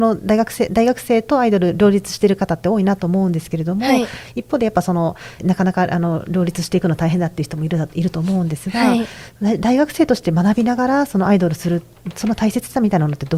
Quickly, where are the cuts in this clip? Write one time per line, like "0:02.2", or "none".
0:05.4